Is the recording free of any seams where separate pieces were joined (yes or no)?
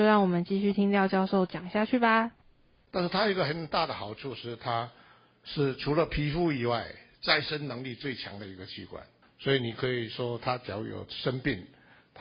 no